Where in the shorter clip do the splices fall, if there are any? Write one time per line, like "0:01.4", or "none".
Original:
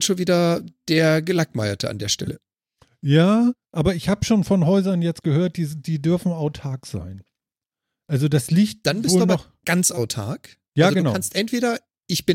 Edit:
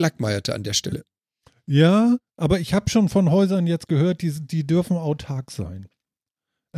none